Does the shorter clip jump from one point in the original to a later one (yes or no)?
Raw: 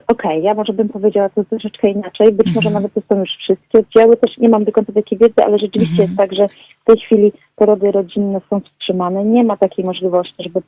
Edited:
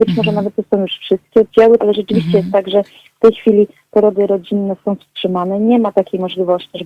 yes